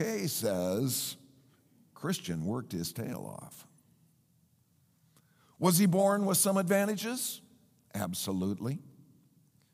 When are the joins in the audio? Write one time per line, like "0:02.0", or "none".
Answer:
none